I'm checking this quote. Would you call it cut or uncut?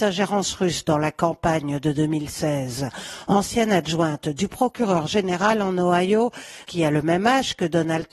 cut